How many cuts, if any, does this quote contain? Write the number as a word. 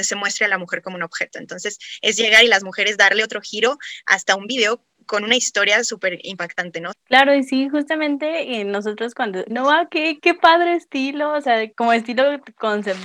three